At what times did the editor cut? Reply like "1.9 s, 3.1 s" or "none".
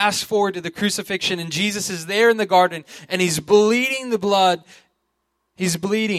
none